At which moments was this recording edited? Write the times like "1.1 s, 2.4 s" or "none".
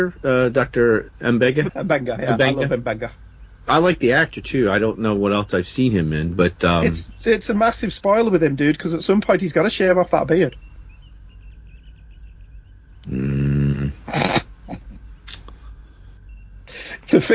1.7 s